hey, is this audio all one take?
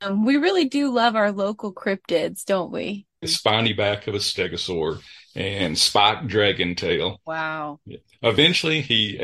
no; 1 cut; at 3.2 s

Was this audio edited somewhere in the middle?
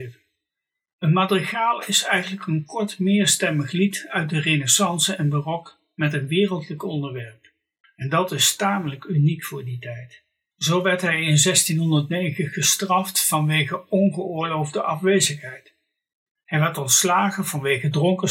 yes; 3 cuts; at 7.8 s, 10.5 s, 16.4 s

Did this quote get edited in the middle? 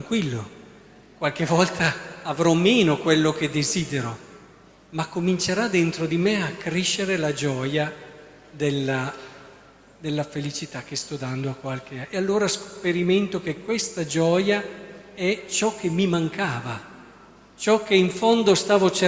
no; 0 cuts

